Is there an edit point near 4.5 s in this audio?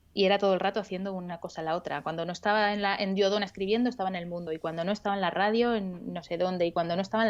no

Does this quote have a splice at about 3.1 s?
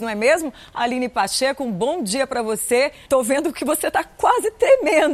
yes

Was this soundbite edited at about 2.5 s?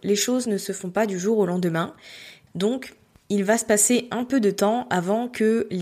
yes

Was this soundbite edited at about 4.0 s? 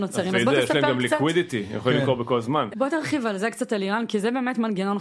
no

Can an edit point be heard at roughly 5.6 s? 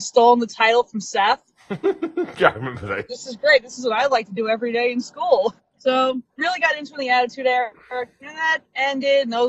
yes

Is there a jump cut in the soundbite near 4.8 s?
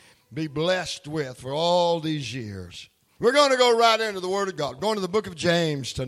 no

